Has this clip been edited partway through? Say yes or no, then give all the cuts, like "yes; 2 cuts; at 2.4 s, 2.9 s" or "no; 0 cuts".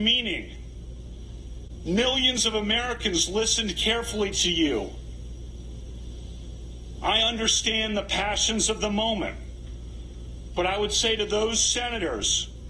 yes; 1 cut; at 7.0 s